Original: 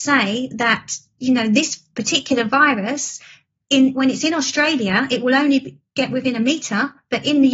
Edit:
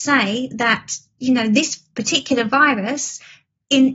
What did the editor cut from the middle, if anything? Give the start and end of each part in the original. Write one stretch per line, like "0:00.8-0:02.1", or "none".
none